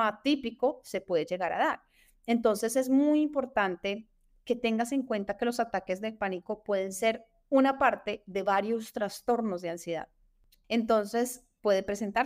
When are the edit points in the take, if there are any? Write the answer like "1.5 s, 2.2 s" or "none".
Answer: 10.6 s